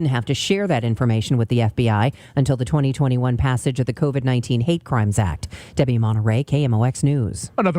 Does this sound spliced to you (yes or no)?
no